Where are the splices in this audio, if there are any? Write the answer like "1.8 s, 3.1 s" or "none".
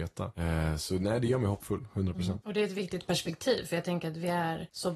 none